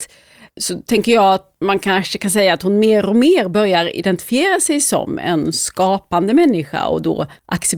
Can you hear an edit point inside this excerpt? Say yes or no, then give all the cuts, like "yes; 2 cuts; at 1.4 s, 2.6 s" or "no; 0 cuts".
no; 0 cuts